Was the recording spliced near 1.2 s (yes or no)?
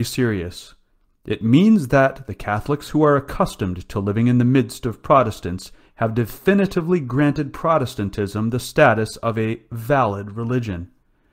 no